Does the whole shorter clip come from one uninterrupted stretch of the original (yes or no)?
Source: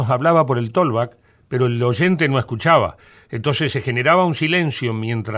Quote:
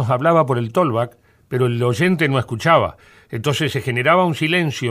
yes